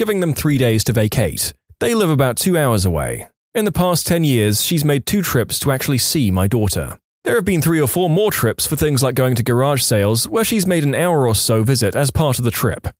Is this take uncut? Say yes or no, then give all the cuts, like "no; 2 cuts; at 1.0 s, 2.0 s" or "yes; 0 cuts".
yes; 0 cuts